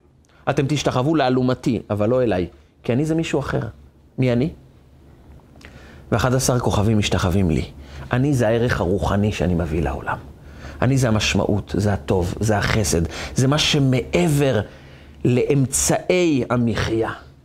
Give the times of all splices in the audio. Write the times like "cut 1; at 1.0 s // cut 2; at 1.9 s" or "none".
none